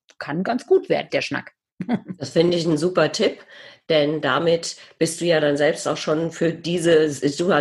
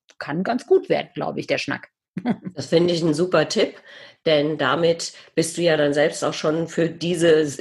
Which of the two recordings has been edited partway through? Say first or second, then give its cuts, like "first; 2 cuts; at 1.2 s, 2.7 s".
first; 1 cut; at 1.1 s